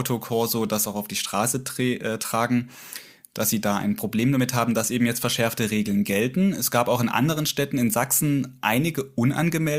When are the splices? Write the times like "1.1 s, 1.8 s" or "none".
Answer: none